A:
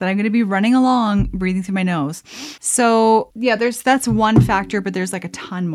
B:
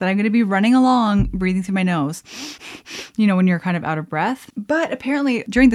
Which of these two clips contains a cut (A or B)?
A